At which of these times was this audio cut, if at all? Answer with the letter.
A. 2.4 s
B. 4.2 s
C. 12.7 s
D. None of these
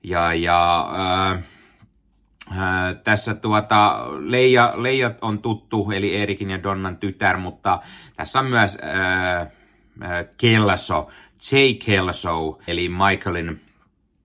C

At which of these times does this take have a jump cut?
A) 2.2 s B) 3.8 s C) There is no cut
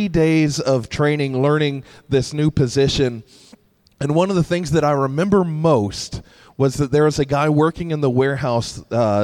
C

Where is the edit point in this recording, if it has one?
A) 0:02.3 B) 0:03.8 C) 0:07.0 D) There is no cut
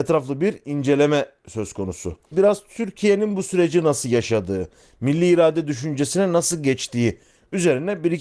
A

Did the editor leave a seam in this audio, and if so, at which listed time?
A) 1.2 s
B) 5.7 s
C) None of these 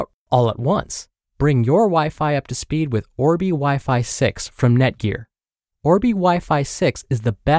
A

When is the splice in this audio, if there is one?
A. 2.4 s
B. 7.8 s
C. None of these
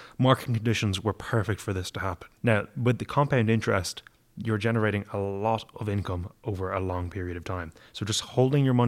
A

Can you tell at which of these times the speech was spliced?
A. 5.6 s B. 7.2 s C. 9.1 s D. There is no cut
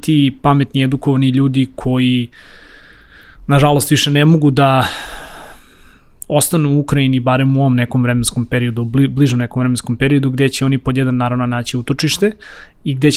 D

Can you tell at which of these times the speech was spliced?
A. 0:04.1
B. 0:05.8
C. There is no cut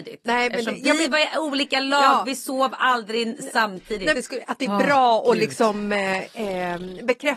A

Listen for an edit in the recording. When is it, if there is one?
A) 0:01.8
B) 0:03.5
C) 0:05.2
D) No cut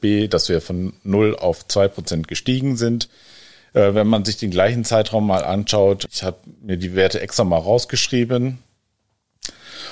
D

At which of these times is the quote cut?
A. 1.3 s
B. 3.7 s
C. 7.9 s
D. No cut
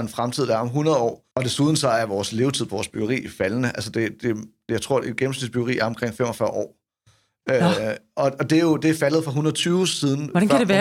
A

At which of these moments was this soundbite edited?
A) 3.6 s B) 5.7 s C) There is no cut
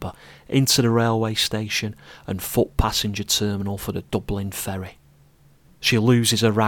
B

